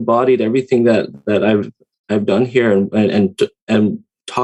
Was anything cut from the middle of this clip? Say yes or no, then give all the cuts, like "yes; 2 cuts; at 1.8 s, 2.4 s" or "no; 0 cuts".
no; 0 cuts